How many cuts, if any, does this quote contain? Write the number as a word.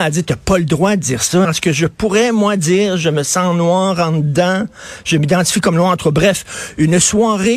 one